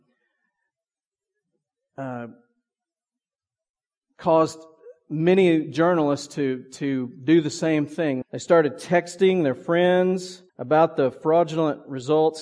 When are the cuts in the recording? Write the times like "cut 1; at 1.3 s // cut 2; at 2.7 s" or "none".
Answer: cut 1; at 8.2 s // cut 2; at 10.5 s